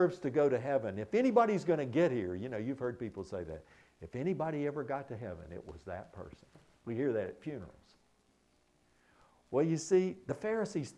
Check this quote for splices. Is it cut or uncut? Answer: uncut